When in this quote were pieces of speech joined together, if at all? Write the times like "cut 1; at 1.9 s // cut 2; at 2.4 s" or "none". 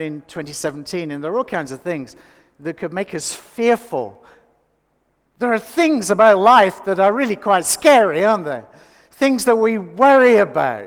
none